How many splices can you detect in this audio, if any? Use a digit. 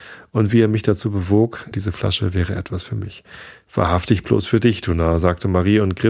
1